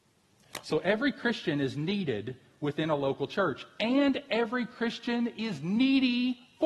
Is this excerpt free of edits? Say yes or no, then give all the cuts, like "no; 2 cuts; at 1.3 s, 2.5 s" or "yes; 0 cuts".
yes; 0 cuts